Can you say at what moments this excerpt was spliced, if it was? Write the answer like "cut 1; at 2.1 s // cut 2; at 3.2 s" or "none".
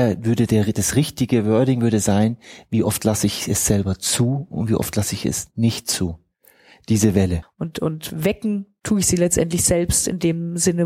cut 1; at 7.4 s